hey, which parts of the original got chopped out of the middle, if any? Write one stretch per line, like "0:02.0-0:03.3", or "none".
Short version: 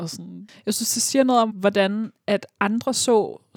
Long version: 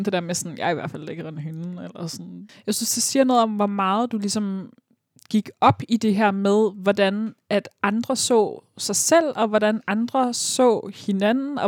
0:03.5-0:06.7